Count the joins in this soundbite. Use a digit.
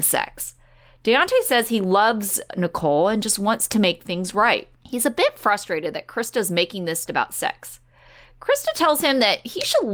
2